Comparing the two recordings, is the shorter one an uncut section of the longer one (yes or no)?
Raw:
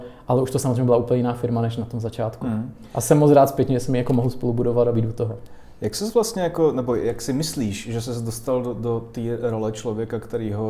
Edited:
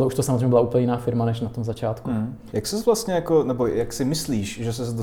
no